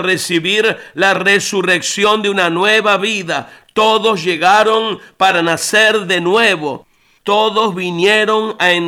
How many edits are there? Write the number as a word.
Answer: one